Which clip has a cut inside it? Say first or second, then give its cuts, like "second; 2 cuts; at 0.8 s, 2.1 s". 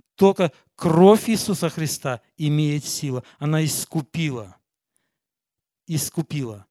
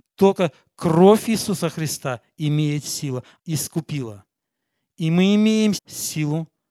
second; 2 cuts; at 3.4 s, 5.8 s